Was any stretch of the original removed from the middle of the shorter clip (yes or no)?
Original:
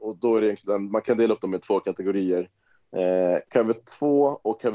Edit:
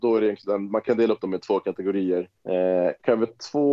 yes